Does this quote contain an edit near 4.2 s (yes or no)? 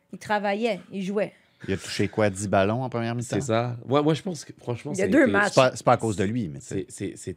no